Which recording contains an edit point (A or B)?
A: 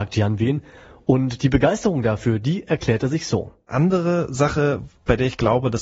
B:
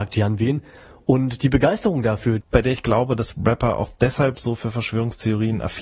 B